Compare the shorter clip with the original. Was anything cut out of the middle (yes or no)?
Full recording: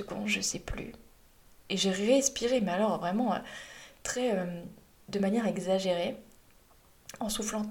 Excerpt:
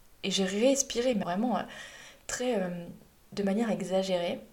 yes